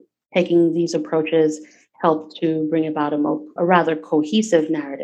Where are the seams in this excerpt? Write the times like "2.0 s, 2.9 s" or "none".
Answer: 3.6 s